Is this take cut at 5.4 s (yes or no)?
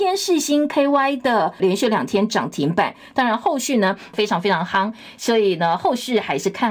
no